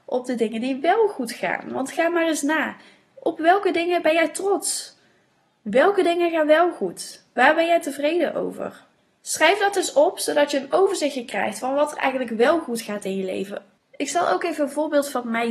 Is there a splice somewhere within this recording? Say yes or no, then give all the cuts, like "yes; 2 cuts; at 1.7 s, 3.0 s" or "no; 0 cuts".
no; 0 cuts